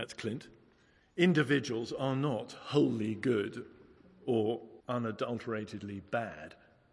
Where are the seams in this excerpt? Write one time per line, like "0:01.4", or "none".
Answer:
0:01.0
0:04.8